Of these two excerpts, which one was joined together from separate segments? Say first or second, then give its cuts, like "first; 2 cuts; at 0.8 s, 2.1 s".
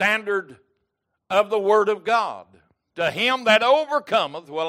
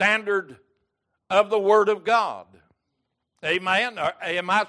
first; 1 cut; at 2.9 s